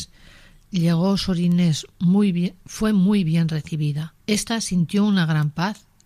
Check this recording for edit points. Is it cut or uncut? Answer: cut